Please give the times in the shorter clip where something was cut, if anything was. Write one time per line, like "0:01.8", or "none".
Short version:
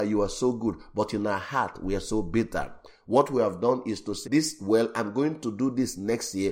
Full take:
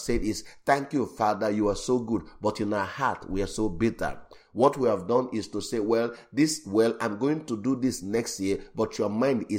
0:04.2